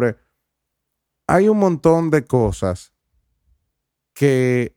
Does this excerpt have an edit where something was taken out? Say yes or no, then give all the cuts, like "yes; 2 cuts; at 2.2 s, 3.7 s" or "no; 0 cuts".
no; 0 cuts